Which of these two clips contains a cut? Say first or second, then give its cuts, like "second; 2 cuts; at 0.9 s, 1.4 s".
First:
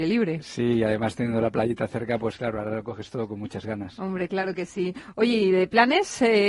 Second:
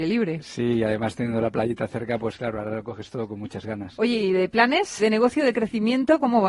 second; 2 cuts; at 4.0 s, 5.0 s